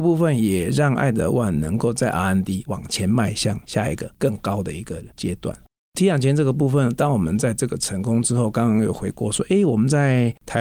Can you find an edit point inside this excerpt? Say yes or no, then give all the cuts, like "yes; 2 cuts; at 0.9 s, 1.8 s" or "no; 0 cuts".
no; 0 cuts